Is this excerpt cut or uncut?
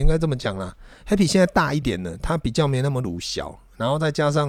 cut